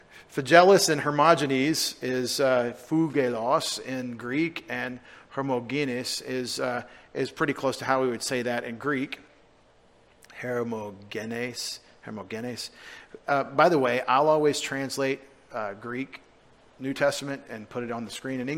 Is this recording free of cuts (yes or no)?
yes